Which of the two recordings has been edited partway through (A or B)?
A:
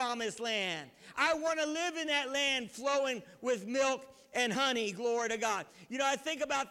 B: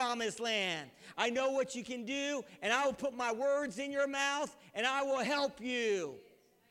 B